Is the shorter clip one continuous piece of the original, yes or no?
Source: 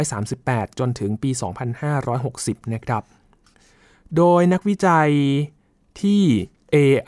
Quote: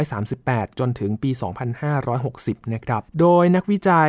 no